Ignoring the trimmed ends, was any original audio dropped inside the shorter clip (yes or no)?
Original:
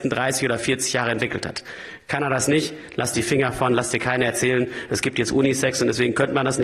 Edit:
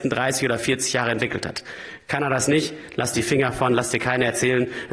no